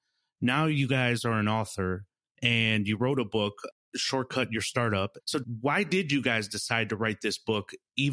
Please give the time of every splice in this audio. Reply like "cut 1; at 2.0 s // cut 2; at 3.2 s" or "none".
cut 1; at 5.2 s